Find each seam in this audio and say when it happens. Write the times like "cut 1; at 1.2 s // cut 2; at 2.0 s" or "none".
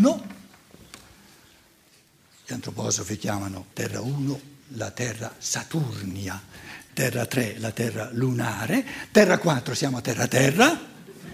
cut 1; at 3.7 s // cut 2; at 6.9 s